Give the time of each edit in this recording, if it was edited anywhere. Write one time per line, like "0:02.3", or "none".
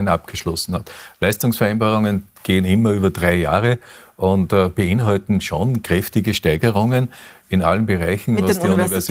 none